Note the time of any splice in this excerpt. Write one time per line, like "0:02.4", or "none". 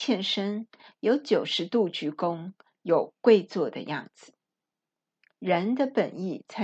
none